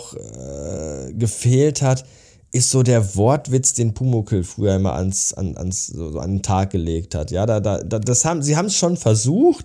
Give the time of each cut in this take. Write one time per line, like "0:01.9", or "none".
none

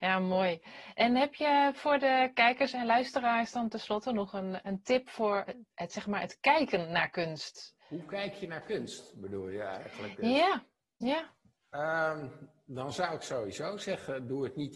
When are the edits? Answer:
none

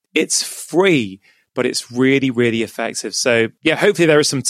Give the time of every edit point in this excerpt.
none

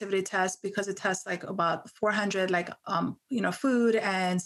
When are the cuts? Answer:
none

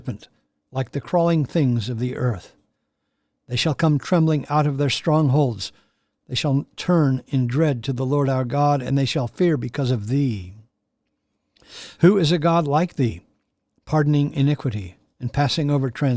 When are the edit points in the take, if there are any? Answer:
none

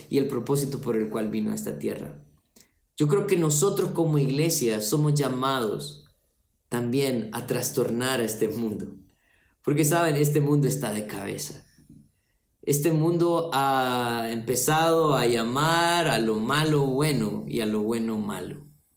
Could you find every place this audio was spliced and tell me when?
none

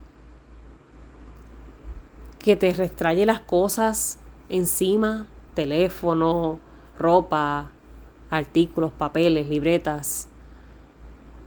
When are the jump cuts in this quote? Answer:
0:05.5

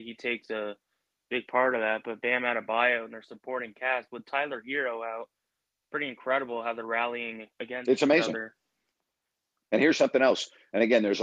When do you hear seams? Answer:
0:07.5

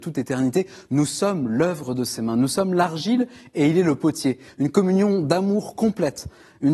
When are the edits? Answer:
0:04.5

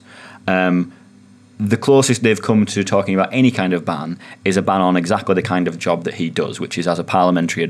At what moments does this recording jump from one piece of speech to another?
none

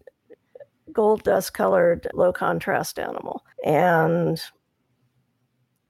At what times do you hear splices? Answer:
0:02.1
0:03.5

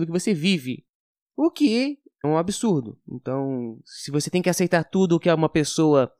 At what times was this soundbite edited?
0:02.2

